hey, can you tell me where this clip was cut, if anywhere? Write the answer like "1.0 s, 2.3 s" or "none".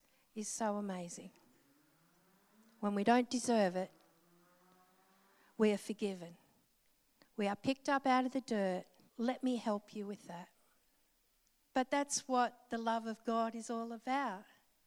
9.1 s, 11.6 s